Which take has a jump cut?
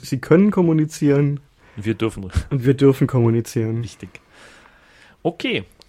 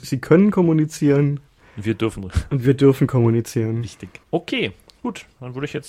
second; 1 cut; at 4.2 s

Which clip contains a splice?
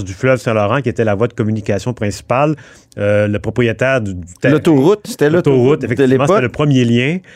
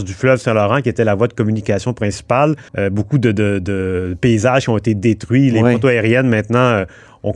second; 1 cut; at 2.7 s

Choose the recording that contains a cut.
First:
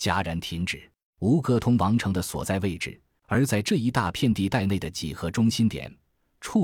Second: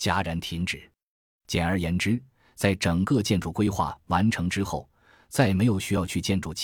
first; 2 cuts; at 1.1 s, 3.2 s

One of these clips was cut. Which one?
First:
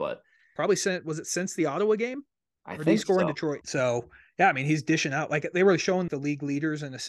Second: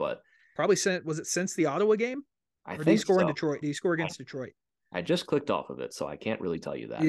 first; 2 cuts; at 3.6 s, 6.1 s

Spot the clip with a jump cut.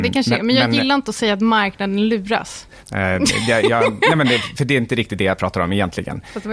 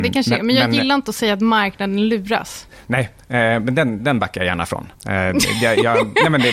first; 1 cut; at 2.8 s

